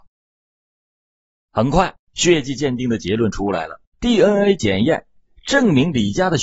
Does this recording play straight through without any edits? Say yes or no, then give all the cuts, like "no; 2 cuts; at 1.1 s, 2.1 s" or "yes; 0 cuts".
no; 2 cuts; at 2.0 s, 3.9 s